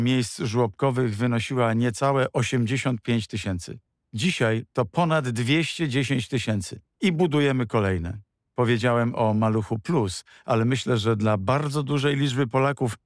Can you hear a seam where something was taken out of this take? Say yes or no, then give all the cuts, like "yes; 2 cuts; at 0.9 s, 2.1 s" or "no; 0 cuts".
no; 0 cuts